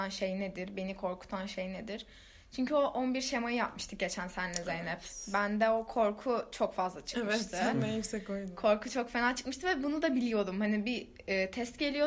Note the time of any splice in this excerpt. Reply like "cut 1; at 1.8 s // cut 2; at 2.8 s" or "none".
none